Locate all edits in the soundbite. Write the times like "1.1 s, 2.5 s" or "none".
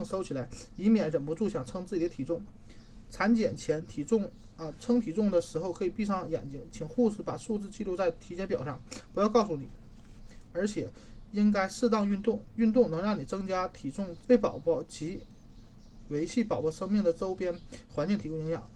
10.5 s, 14.2 s